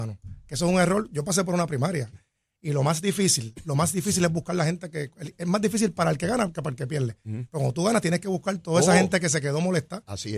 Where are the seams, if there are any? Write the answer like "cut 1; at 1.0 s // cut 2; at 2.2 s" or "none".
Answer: cut 1; at 2.1 s